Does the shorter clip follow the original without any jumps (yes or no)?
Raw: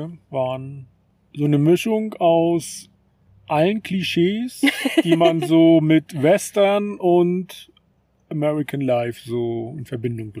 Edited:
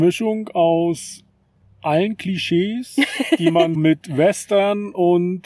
no